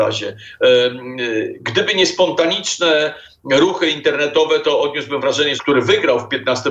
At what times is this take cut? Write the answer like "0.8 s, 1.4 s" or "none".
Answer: 5.6 s